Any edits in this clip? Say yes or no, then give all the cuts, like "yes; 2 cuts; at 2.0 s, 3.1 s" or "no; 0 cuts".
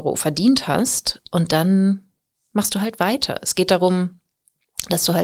no; 0 cuts